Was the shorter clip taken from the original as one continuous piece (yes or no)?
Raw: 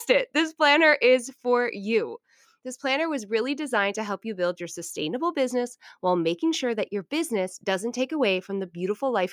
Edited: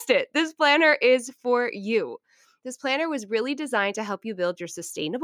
yes